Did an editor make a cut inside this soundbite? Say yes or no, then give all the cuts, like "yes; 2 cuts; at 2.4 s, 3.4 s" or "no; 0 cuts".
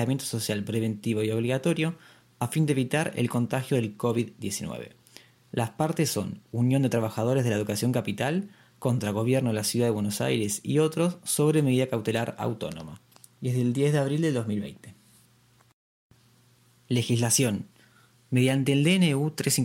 no; 0 cuts